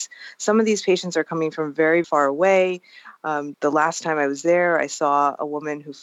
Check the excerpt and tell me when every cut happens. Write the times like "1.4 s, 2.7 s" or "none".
2.0 s, 3.5 s